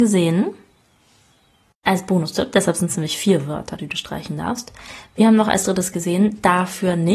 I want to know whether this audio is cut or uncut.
uncut